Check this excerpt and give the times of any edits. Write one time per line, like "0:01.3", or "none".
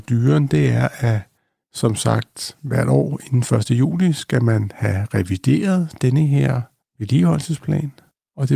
none